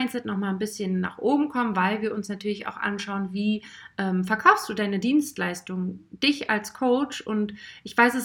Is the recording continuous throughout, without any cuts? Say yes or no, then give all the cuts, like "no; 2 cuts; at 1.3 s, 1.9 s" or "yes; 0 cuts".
yes; 0 cuts